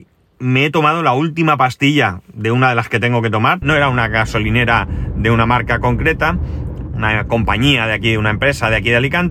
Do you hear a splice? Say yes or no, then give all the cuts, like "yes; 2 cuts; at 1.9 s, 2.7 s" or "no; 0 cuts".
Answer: yes; 2 cuts; at 3.6 s, 6.9 s